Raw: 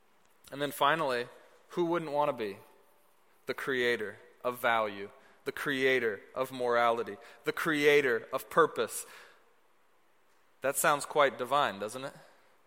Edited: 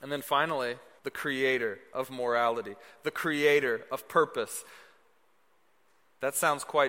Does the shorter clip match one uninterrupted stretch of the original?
no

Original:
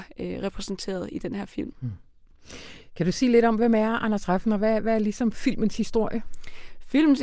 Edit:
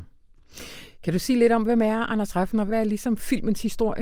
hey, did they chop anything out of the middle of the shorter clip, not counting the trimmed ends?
yes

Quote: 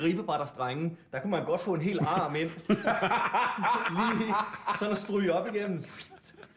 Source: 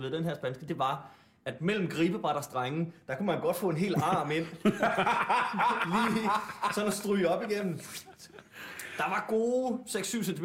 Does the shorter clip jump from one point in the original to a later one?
no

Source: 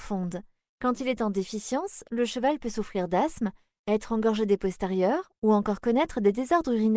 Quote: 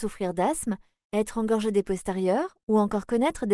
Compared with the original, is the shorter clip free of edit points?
yes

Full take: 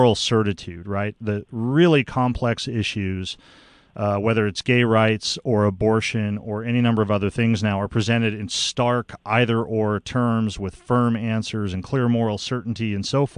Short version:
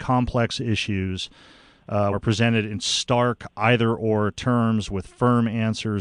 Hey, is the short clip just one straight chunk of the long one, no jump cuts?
no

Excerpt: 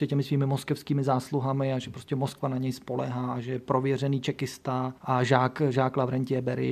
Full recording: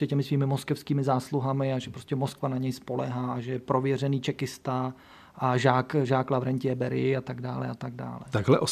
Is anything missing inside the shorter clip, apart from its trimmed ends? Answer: yes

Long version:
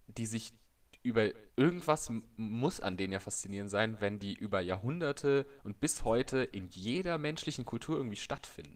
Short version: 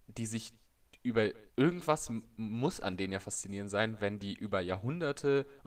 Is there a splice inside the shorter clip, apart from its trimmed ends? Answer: no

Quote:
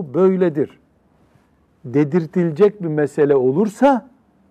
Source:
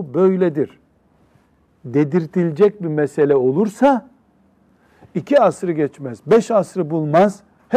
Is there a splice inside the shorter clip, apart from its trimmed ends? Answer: no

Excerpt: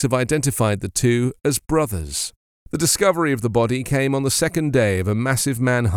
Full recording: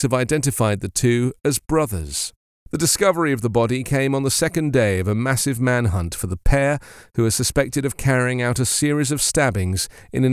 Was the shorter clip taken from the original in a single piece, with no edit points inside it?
yes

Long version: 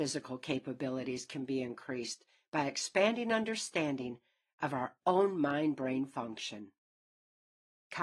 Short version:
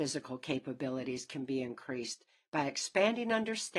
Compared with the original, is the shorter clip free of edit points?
yes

